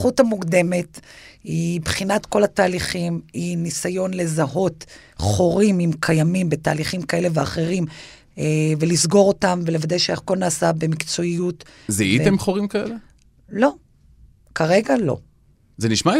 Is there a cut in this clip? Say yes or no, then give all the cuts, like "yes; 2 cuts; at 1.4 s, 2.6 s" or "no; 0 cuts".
no; 0 cuts